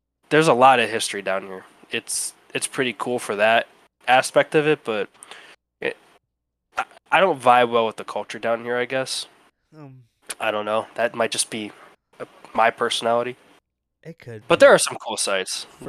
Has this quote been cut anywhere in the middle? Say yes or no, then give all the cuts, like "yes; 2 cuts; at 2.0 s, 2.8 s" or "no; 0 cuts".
no; 0 cuts